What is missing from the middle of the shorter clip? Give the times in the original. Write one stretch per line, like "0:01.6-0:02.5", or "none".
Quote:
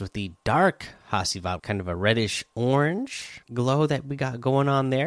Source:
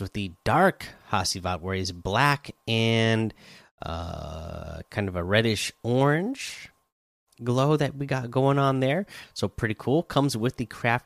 0:01.6-0:04.9
0:06.7-0:07.3